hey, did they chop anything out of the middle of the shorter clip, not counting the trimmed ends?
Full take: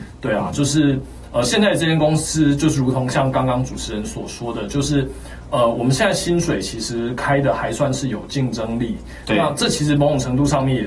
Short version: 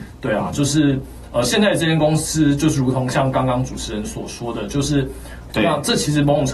yes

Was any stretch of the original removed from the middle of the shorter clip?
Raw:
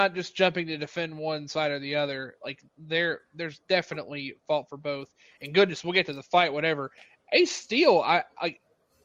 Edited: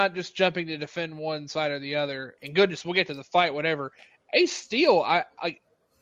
yes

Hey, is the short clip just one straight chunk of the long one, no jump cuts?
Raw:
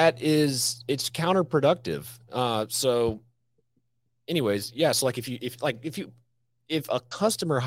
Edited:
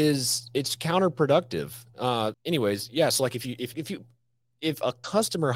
no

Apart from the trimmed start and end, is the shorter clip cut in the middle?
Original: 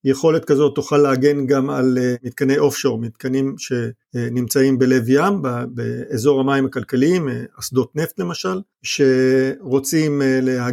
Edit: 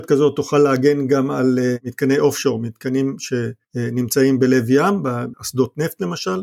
yes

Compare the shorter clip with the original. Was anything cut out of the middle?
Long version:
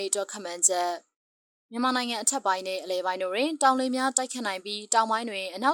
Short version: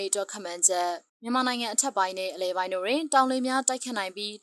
yes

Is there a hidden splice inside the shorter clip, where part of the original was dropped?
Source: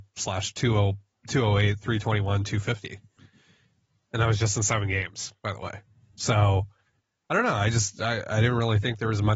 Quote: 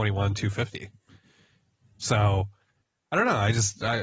yes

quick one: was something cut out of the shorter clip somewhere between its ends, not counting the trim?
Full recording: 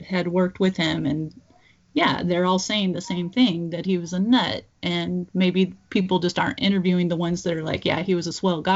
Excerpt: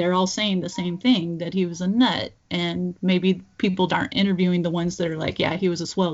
yes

